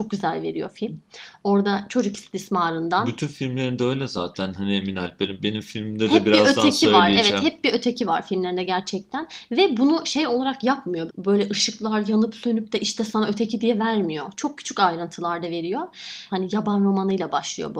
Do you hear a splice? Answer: yes; 2 cuts; at 11.1 s, 16.3 s

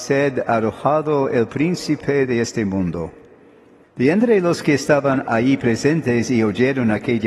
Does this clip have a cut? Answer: yes; 1 cut; at 3.8 s

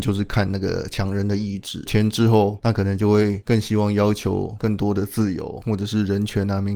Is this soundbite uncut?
no; 1 cut; at 1.9 s

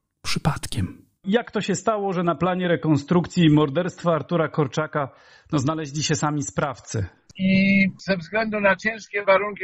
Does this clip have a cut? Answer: yes; 1 cut; at 7.3 s

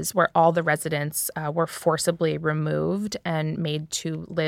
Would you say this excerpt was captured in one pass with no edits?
yes; 0 cuts

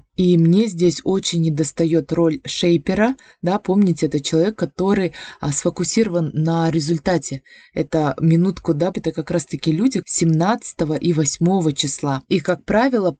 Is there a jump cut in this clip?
yes; 3 cuts; at 8.9 s, 10.0 s, 12.3 s

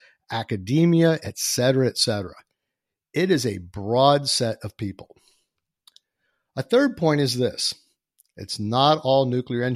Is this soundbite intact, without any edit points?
yes; 0 cuts

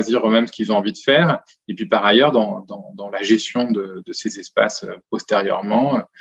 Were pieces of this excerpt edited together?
no; 0 cuts

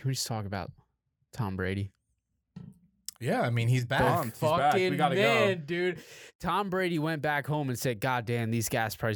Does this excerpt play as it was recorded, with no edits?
yes; 0 cuts

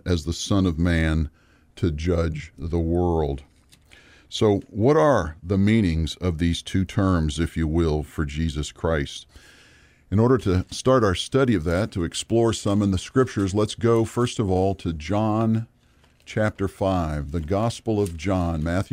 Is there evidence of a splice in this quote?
yes; 1 cut; at 7.4 s

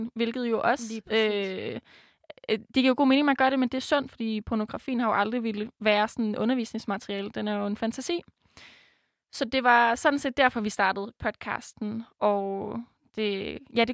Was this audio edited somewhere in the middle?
no; 0 cuts

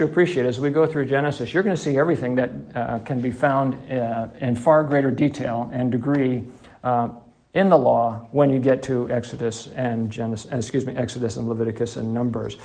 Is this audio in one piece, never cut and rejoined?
yes; 0 cuts

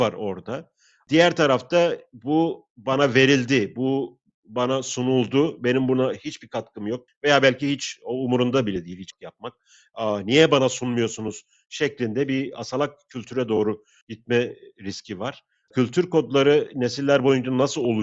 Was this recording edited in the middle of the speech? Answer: yes; 2 cuts; at 7.1 s, 15.7 s

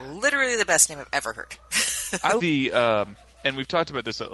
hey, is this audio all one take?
no; 1 cut; at 2.4 s

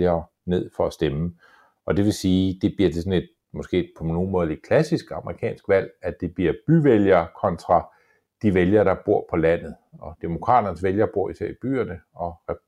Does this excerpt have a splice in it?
no; 0 cuts

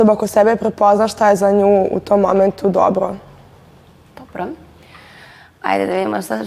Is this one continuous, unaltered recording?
yes; 0 cuts

